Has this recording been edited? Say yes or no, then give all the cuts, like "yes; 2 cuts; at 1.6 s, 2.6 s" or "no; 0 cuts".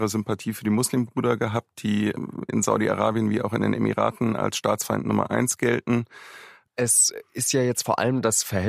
yes; 1 cut; at 6.7 s